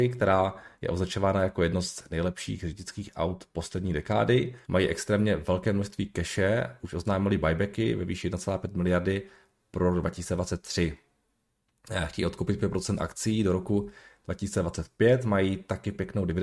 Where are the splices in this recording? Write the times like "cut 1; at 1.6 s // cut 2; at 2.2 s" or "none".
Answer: cut 1; at 4.6 s